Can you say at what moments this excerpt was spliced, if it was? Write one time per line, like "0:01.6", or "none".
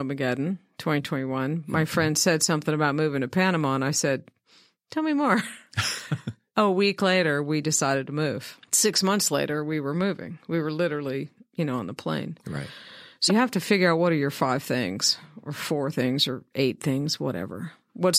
0:08.7
0:13.3